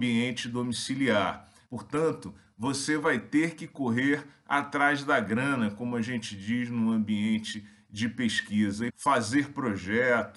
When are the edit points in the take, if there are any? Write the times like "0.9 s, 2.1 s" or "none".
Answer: 1.7 s, 8.9 s